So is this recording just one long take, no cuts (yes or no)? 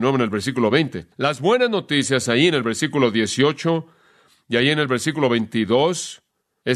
no